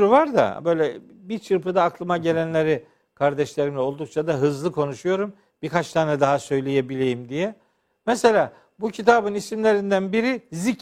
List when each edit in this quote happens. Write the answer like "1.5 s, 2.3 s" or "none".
none